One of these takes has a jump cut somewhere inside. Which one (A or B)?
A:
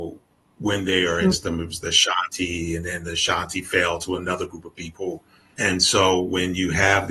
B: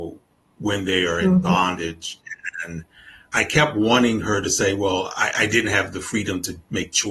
A